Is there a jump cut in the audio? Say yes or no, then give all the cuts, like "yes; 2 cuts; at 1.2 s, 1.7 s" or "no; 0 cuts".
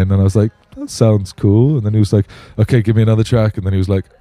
no; 0 cuts